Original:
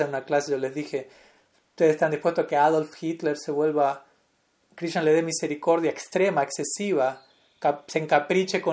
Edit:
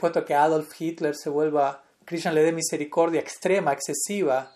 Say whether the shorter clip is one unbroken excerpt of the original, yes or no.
no